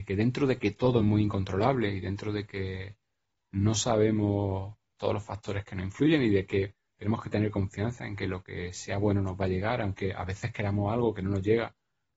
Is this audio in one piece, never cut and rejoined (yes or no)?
yes